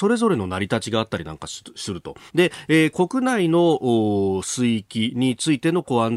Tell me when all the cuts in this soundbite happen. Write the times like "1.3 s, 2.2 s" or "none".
2.3 s